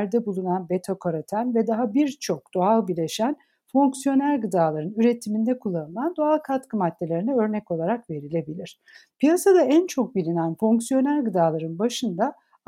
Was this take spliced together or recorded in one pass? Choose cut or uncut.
cut